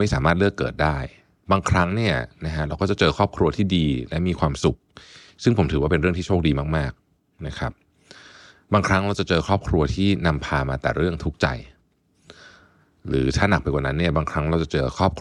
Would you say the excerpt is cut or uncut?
uncut